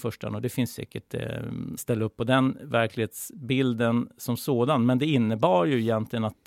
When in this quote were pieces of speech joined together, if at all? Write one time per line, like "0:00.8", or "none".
0:01.8